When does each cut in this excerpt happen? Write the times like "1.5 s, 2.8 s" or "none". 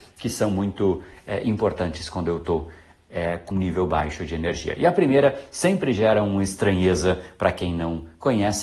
3.5 s

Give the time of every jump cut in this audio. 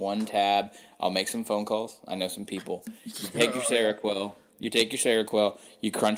none

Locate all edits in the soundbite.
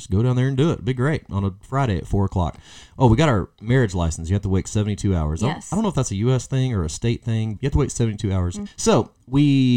7.6 s, 8.7 s

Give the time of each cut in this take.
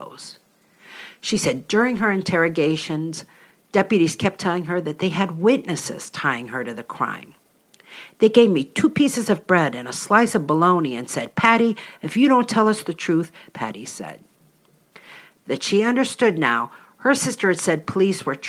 13.5 s, 15.4 s

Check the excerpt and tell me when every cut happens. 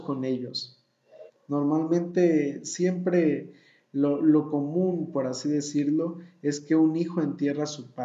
1.3 s

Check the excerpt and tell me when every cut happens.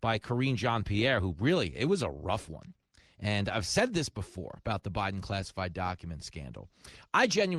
none

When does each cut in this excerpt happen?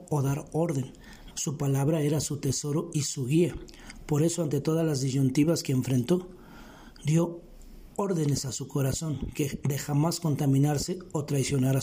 1.3 s

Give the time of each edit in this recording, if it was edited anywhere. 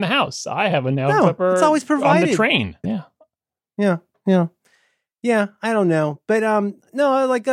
2.8 s

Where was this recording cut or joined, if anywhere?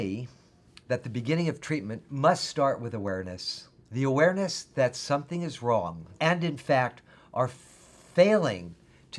3.8 s, 6.2 s

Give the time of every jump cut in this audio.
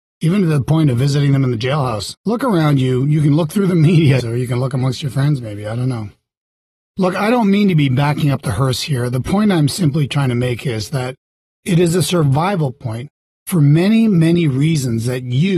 4.2 s

